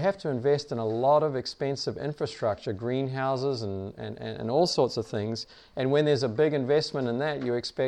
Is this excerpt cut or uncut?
uncut